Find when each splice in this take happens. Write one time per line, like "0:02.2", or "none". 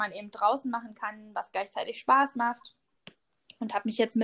none